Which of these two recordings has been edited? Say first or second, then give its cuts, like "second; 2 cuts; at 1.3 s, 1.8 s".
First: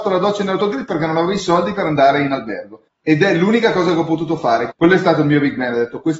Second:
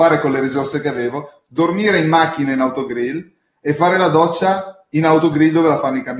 first; 2 cuts; at 2.9 s, 4.7 s